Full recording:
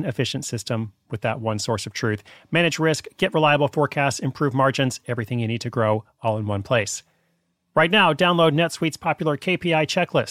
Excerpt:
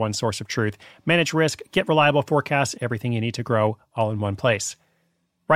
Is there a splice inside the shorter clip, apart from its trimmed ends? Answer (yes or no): yes